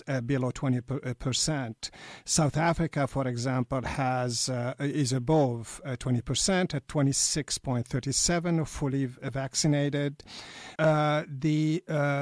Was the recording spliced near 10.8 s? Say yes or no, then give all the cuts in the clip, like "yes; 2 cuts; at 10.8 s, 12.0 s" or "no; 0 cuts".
yes; 1 cut; at 10.8 s